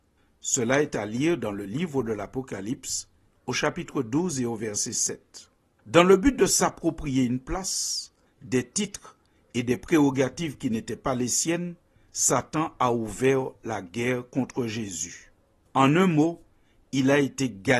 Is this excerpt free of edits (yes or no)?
yes